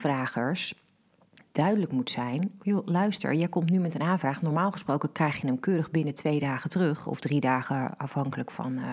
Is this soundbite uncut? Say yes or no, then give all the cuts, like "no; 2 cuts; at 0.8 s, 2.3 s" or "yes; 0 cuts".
yes; 0 cuts